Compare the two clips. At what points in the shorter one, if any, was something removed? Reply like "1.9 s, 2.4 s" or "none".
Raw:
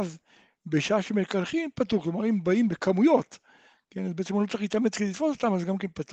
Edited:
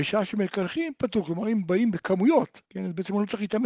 2.6 s